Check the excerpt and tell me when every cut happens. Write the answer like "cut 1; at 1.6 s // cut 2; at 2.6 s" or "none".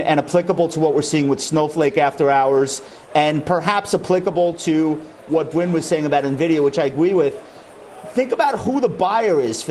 none